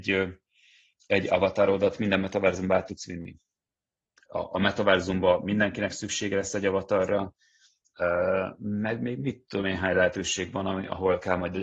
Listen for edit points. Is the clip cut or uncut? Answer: cut